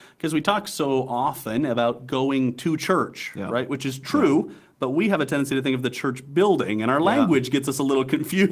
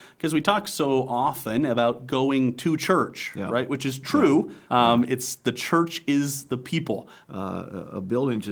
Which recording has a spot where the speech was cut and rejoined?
second; 2 cuts; at 4.7 s, 7.2 s

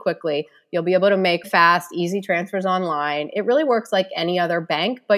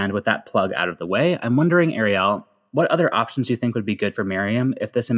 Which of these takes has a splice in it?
first; 1 cut; at 1.4 s

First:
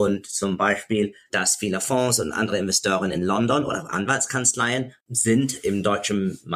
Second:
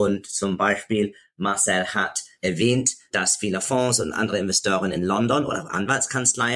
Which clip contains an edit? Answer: first; 1 cut; at 1.3 s

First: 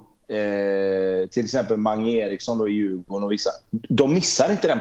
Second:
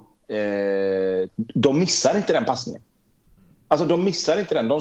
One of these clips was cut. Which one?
second; 1 cut; at 1.3 s

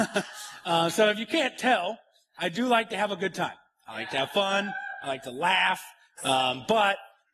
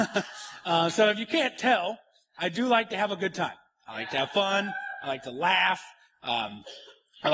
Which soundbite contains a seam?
first; 1 cut; at 6.2 s

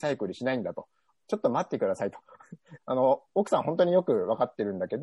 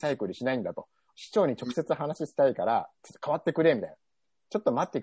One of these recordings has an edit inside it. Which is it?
first; 2 cuts; at 1.2 s, 2.8 s

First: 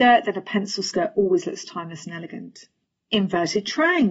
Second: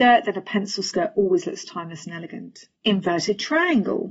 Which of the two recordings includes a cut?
second; 1 cut; at 2.8 s

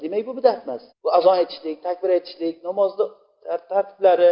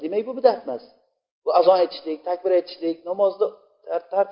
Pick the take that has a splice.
first; 1 cut; at 0.9 s

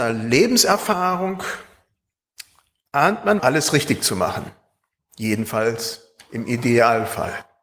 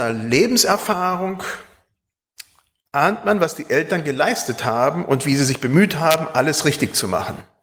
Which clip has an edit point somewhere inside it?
first; 1 cut; at 3.4 s

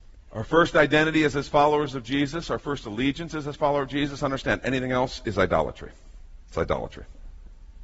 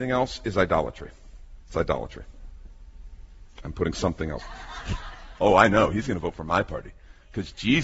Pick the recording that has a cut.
second; 1 cut; at 4.4 s

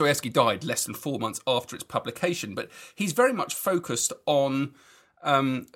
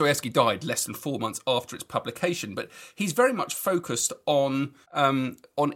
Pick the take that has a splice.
second; 1 cut; at 4.8 s

